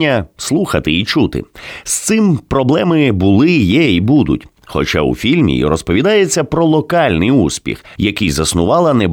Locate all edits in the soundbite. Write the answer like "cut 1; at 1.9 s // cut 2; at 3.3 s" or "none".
cut 1; at 8.0 s